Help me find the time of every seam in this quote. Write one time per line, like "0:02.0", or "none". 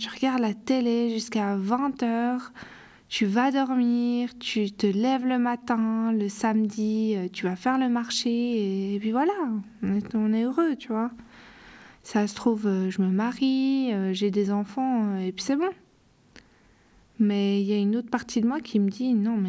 none